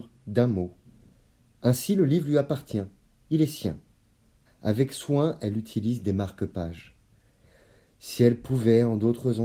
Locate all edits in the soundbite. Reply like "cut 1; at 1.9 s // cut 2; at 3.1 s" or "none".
cut 1; at 4.5 s